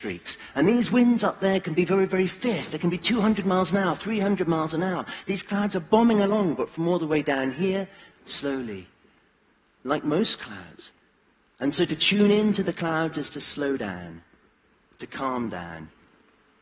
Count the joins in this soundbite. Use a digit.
1